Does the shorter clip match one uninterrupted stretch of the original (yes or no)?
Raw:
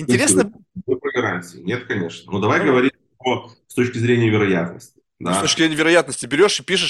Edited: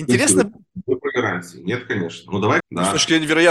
no